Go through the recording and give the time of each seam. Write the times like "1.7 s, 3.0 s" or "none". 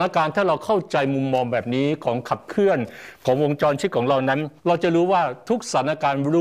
4.6 s